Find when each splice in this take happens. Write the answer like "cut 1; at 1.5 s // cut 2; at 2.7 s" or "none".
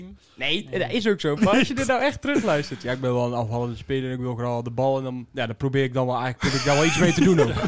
cut 1; at 1.4 s